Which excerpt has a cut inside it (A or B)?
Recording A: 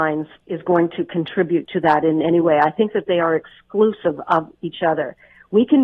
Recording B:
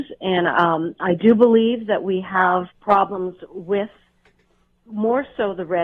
B